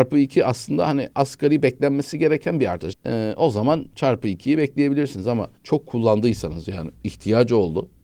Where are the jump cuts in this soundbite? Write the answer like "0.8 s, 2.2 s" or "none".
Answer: 2.9 s, 5.6 s